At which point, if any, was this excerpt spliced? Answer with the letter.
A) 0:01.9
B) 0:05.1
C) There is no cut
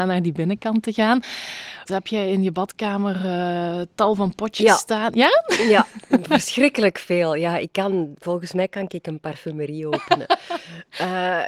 A